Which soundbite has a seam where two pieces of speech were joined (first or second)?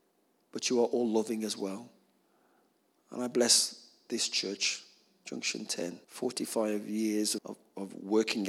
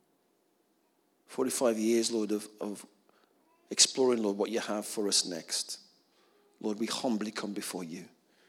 first